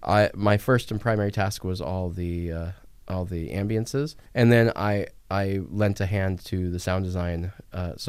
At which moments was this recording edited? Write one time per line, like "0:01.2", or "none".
0:04.3